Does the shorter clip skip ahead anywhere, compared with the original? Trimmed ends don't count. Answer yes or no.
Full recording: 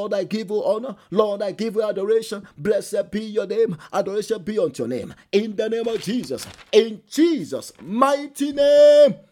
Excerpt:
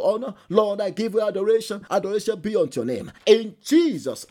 yes